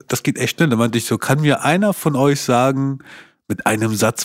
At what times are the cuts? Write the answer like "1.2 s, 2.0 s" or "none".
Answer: none